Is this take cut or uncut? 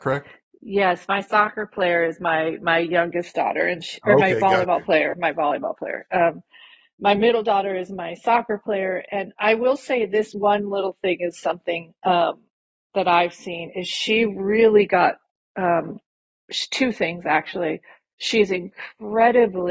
uncut